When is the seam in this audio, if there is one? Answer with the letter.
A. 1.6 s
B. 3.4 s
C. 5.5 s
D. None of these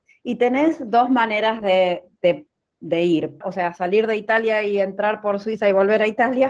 B